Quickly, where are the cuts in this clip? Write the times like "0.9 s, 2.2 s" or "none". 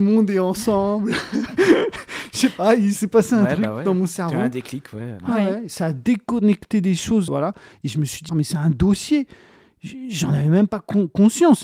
7.3 s, 8.3 s

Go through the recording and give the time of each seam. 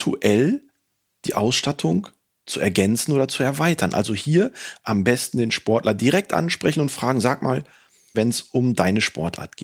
8.1 s

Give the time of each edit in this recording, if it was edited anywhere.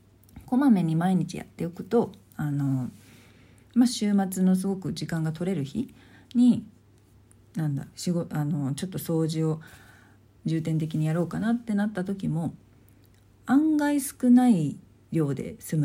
7.9 s

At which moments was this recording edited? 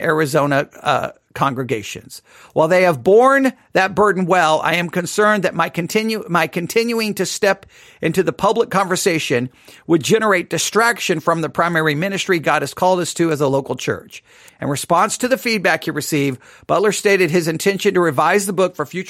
14.5 s

